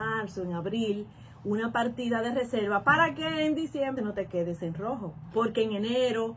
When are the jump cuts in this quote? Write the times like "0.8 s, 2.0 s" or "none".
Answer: 4.0 s, 5.3 s